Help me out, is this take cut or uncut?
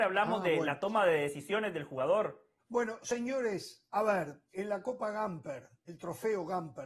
cut